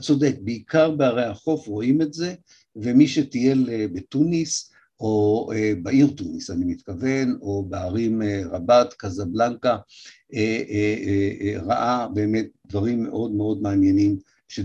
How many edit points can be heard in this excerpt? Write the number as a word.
zero